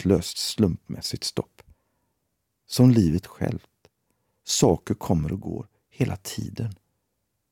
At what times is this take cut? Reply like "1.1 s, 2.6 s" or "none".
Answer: none